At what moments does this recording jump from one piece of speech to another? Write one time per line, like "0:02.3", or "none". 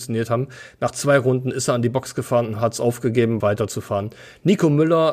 0:03.4